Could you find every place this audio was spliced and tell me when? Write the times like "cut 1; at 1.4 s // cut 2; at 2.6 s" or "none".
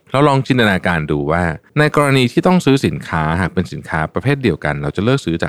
cut 1; at 1.7 s